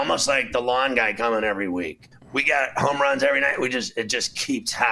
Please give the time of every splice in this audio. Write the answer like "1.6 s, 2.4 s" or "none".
2.1 s